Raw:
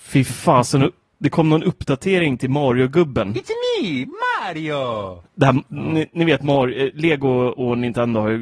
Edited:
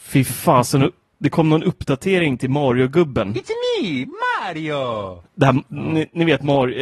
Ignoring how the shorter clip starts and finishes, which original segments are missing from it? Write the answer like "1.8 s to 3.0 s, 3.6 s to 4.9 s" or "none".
none

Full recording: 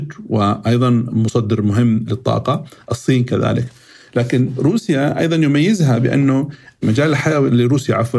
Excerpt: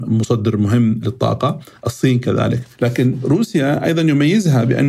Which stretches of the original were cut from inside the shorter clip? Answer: 3.8 s to 4.1 s

